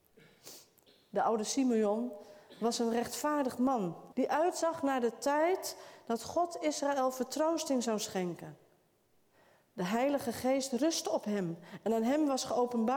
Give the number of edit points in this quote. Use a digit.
1